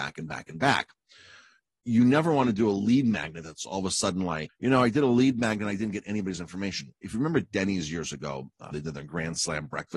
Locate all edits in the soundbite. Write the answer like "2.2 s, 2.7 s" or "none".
4.5 s, 8.7 s